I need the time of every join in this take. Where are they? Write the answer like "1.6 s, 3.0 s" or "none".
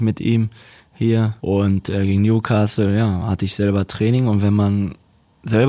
none